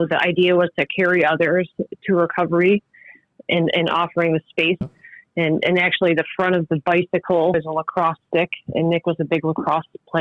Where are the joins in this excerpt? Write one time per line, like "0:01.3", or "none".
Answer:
0:04.8
0:07.5